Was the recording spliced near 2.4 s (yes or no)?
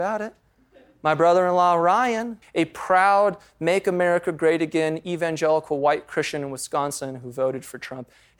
yes